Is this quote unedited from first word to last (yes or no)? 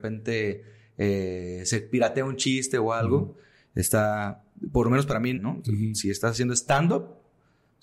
no